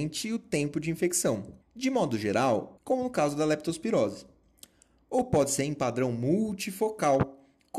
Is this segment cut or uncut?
cut